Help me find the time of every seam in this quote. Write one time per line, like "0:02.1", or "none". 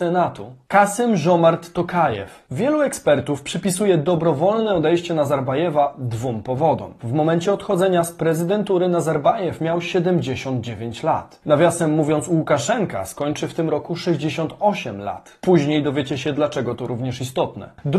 0:07.0